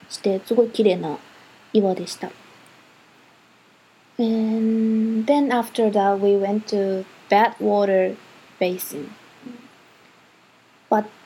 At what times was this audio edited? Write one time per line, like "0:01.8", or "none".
none